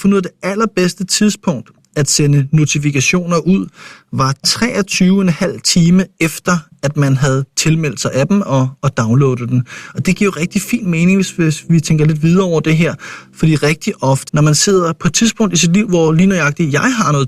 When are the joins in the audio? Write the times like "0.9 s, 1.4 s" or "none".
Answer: 14.3 s